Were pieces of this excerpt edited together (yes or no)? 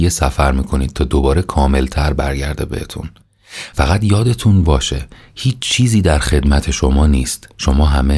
yes